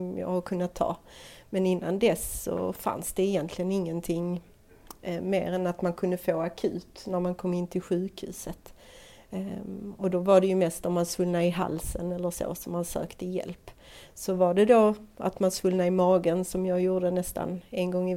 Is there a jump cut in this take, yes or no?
no